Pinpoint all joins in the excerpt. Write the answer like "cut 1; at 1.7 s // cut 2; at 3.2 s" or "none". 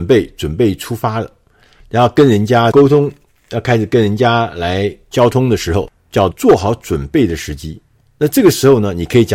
cut 1; at 6.3 s

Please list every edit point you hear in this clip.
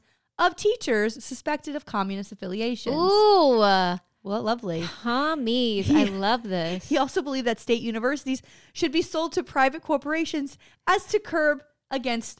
none

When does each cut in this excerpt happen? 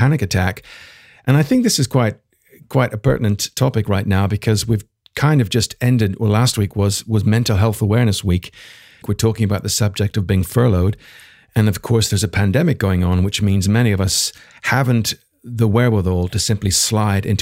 cut 1; at 9.0 s

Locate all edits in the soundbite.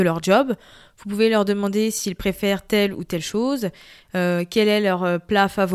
none

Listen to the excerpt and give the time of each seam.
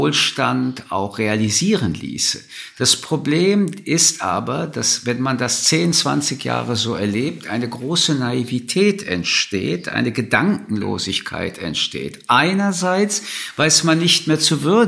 none

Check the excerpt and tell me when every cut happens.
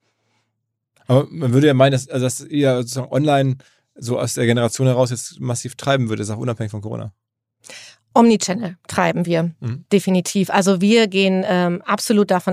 none

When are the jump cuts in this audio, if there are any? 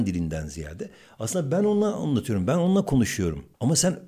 none

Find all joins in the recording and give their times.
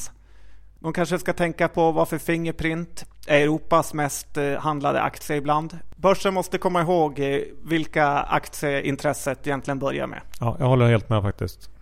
cut 1; at 6.0 s

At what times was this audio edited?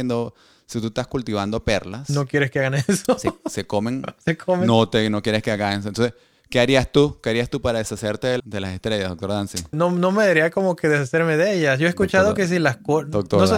cut 1; at 8.4 s // cut 2; at 9.7 s

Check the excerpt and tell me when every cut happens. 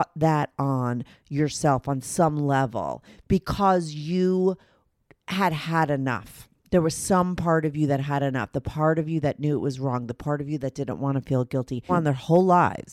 cut 1; at 11.9 s

